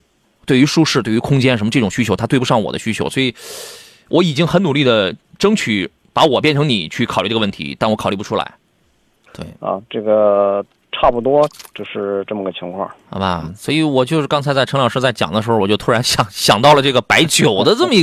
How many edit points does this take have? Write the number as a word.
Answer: one